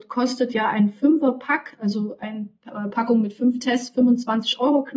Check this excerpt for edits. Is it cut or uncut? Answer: uncut